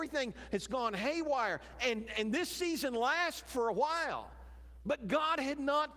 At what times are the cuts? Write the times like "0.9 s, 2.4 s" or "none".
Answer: none